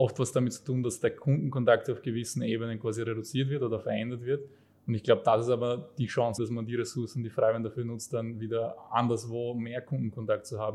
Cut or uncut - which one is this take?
cut